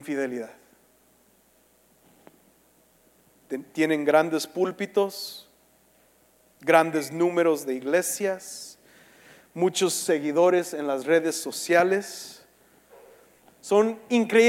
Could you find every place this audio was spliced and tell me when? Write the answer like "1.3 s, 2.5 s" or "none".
13.5 s